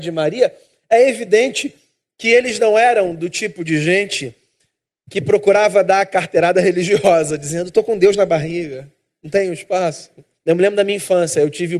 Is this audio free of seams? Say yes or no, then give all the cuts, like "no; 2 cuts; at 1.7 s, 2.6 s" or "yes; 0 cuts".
no; 1 cut; at 10.3 s